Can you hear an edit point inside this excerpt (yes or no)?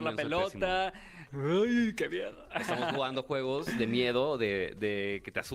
yes